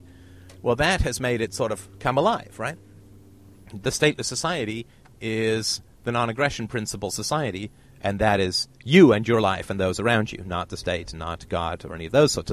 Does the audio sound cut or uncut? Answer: uncut